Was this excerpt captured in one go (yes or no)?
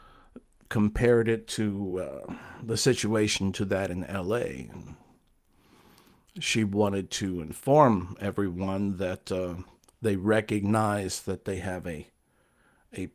yes